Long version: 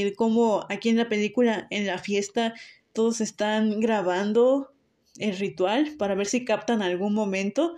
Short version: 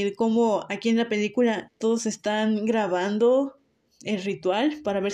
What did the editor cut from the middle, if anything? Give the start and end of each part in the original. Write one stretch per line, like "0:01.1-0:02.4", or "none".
0:01.7-0:02.8